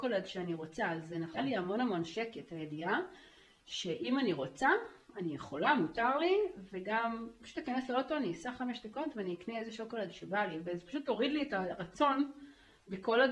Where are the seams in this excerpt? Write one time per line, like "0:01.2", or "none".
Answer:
none